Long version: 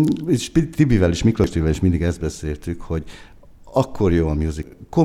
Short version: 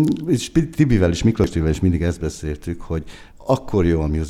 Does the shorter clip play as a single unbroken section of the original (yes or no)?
no